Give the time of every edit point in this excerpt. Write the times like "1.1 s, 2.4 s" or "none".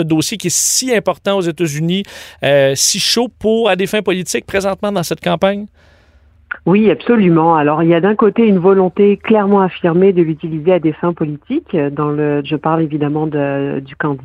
12.4 s

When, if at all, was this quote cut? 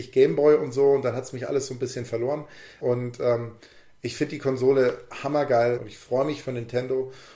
2.8 s, 5.7 s

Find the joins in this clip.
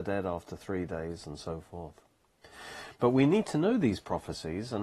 none

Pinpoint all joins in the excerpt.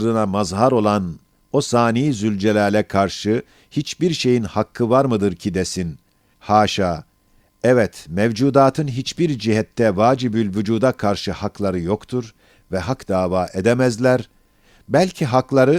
6.3 s

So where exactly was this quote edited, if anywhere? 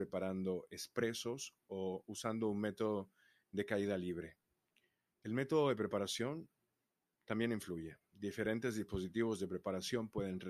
5.1 s

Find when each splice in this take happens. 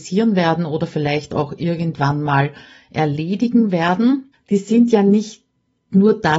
4.3 s

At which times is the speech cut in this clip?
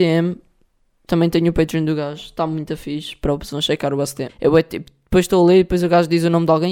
1.1 s, 4.3 s

